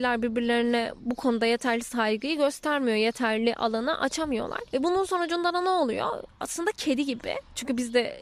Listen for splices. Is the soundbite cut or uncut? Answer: uncut